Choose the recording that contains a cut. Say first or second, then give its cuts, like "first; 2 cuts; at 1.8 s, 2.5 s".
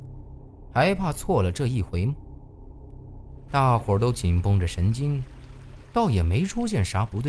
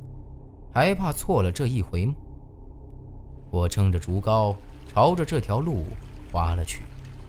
first; 2 cuts; at 3.5 s, 5.8 s